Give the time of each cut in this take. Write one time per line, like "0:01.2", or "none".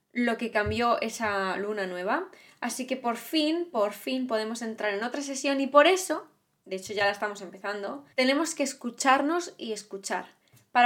0:06.5
0:08.1